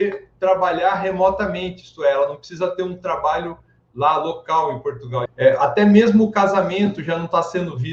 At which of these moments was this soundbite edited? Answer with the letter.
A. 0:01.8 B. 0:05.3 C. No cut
B